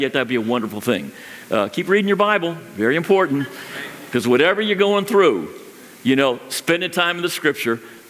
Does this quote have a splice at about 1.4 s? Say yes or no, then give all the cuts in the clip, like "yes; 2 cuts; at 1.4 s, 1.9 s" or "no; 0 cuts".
no; 0 cuts